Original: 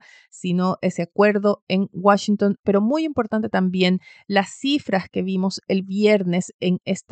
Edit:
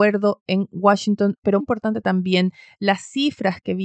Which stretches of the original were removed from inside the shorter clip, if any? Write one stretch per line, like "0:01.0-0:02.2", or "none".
0:02.8-0:03.1